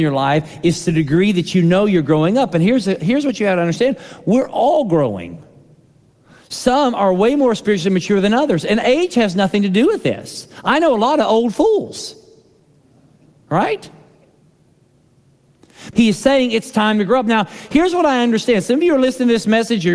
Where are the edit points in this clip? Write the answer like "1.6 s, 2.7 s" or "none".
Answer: 15.9 s